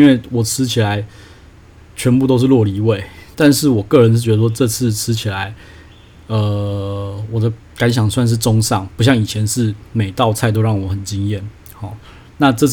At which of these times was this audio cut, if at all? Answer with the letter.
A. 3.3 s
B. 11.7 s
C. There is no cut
A